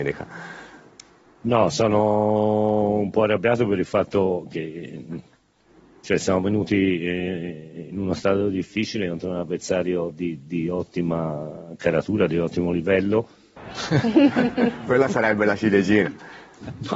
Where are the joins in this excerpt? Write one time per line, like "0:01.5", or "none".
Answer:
0:13.6